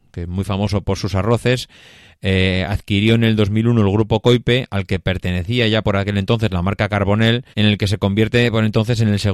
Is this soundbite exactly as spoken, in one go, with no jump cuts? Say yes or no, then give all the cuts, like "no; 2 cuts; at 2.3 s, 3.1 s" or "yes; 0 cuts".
no; 1 cut; at 7.5 s